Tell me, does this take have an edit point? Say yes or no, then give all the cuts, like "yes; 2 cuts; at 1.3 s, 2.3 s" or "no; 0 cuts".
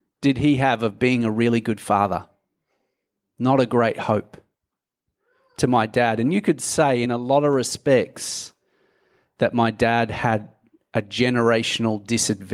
no; 0 cuts